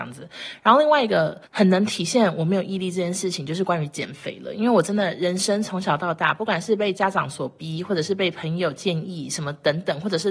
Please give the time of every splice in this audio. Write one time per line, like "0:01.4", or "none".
0:01.4